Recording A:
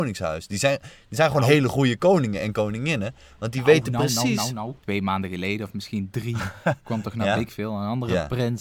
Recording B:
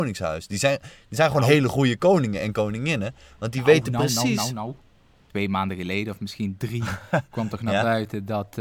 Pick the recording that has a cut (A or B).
A